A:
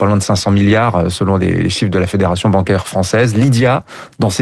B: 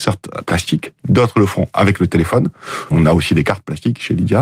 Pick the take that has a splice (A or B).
B